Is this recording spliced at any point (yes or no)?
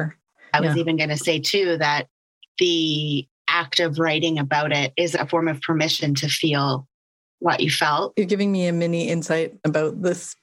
yes